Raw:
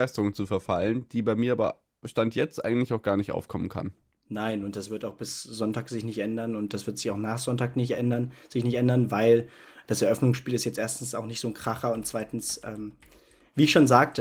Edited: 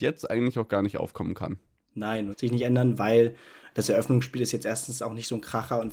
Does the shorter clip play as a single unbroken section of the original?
no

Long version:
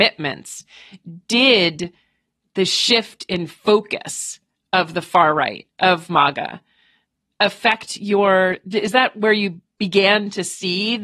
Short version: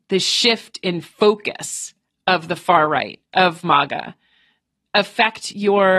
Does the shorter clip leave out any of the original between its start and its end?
no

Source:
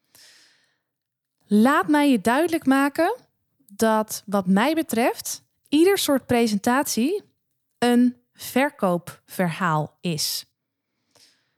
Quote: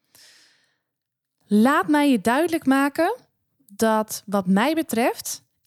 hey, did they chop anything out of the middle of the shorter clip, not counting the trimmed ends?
no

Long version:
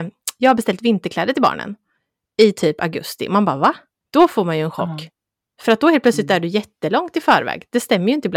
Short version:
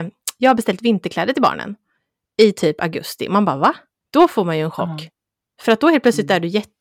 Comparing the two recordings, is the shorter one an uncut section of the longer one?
yes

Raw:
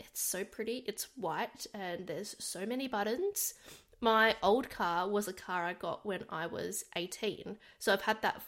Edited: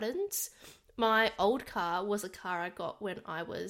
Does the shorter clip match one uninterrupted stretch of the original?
yes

